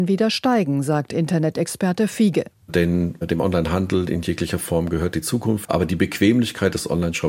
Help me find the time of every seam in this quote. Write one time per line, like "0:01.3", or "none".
0:05.6